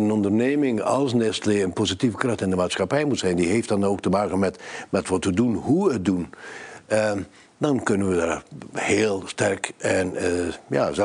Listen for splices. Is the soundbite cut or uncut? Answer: uncut